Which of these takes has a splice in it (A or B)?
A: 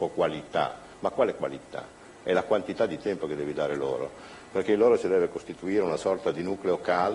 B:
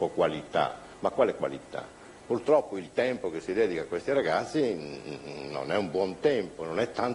B